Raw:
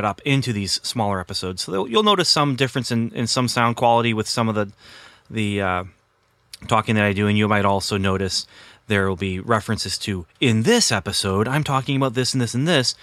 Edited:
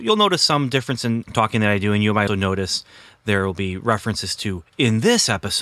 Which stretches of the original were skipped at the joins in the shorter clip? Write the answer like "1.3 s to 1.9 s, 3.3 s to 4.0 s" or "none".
3.1 s to 6.6 s, 7.6 s to 7.9 s